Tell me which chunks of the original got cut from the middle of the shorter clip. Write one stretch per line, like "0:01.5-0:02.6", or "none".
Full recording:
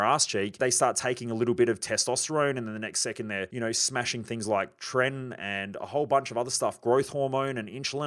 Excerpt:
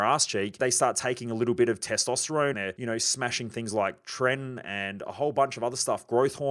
0:02.5-0:03.3